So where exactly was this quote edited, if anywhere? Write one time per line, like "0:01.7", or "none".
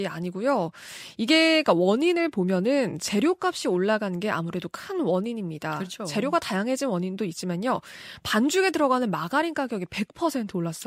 none